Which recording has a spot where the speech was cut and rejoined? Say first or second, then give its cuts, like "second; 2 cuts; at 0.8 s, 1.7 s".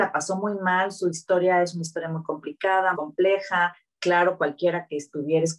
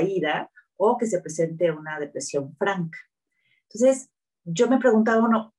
first; 1 cut; at 2.9 s